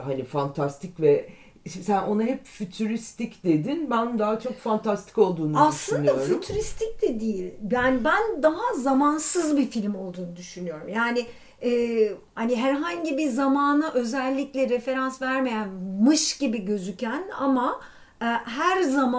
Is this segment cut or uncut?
uncut